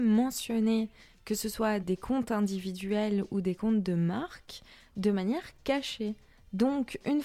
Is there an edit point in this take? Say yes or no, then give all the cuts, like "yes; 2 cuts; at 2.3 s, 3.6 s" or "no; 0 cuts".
yes; 1 cut; at 1.8 s